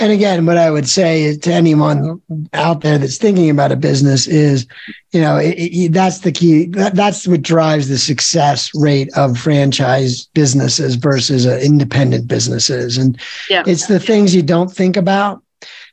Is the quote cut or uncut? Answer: uncut